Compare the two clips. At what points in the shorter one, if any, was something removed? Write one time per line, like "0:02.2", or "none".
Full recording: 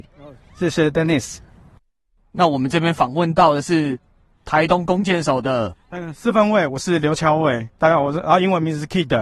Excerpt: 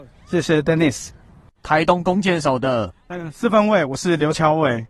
0:01.6